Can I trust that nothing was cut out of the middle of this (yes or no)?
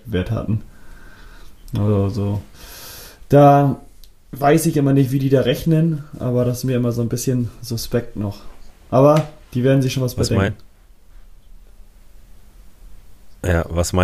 yes